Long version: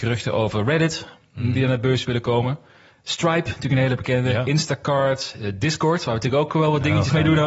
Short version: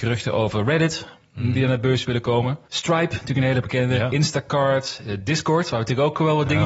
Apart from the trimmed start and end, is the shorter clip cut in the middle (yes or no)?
yes